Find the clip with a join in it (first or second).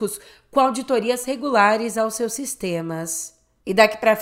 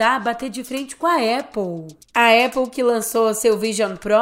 second